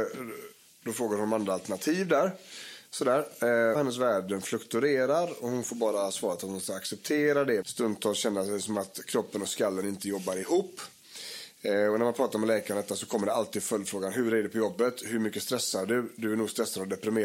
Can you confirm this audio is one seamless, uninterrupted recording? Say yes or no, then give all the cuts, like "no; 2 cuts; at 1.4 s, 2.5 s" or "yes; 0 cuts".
no; 2 cuts; at 3.8 s, 7.6 s